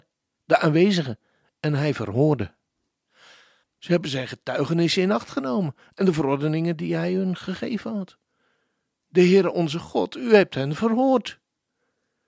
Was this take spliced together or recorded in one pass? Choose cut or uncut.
cut